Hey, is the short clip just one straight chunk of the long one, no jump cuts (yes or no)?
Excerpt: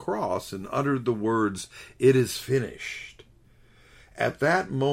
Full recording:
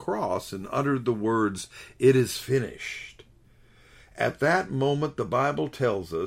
yes